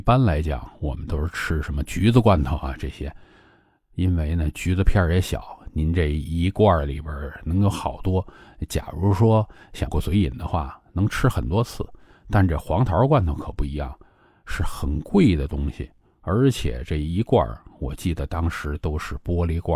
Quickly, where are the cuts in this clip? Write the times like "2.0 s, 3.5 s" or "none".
9.9 s